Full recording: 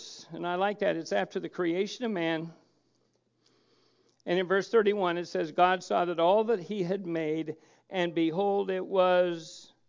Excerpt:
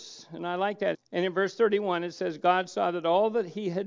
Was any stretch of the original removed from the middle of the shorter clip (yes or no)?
yes